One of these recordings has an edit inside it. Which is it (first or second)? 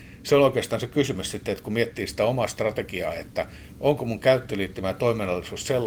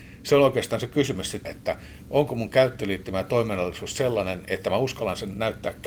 second